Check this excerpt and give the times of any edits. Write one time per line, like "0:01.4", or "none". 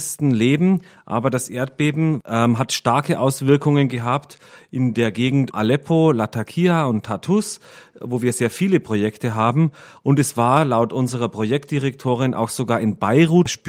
0:05.5